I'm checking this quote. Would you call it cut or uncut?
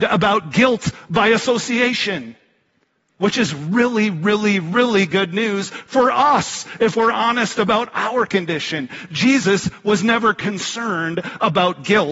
uncut